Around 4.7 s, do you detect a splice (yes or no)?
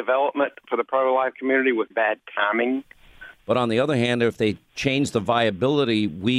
no